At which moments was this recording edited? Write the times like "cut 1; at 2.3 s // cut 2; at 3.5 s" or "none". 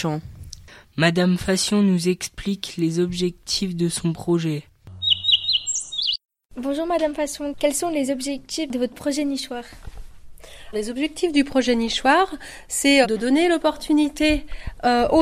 cut 1; at 10.7 s // cut 2; at 13.0 s